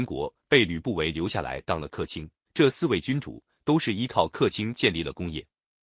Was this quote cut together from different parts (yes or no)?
yes